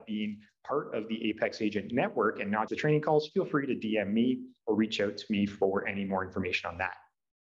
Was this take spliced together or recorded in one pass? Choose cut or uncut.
cut